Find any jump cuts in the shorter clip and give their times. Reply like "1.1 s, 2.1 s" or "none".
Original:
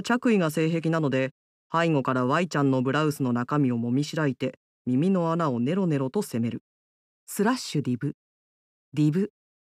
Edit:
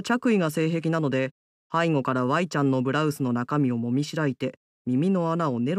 none

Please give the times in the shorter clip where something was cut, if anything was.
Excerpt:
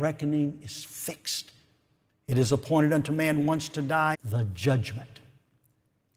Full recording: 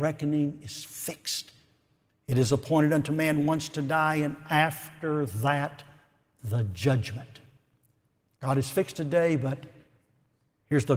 4.1 s

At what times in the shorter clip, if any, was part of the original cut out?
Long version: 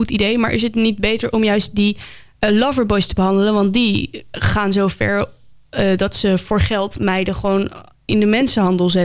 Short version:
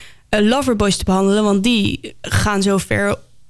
none

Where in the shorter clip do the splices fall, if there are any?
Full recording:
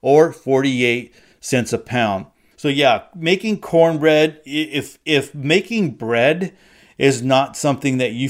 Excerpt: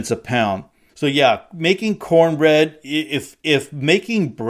none

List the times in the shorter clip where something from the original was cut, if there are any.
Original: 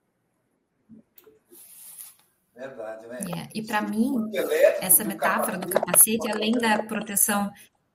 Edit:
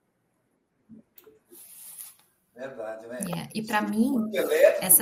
none

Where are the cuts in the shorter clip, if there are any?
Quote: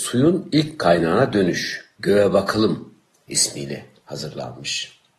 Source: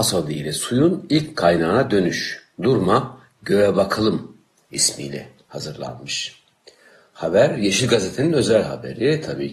1.9 s

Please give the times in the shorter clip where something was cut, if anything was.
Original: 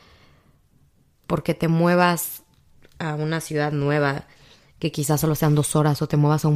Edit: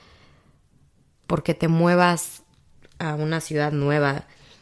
none

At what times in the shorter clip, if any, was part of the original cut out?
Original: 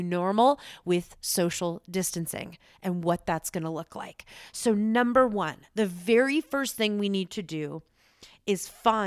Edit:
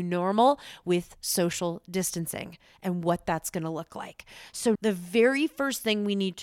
4.8 s

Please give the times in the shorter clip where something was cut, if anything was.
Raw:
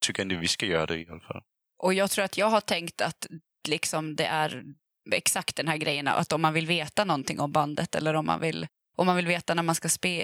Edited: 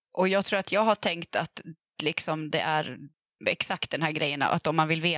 none

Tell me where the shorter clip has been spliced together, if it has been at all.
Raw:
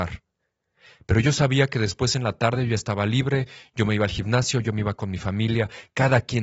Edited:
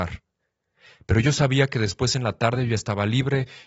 none

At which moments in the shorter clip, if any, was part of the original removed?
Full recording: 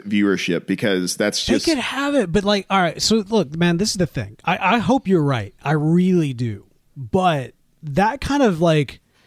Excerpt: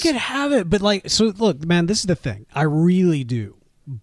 1.0 s, 2.5 s

